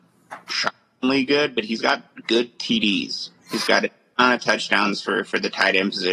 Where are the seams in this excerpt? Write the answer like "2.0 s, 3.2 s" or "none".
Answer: none

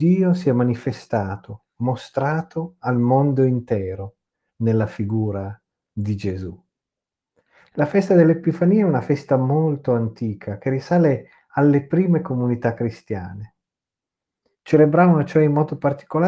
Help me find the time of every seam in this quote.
14.5 s

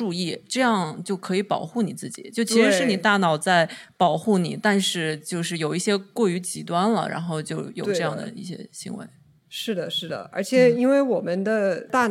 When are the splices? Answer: none

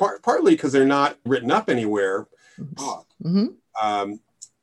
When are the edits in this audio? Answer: 1.3 s, 2.8 s

